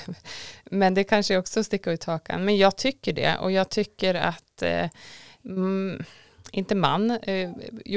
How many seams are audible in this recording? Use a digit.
0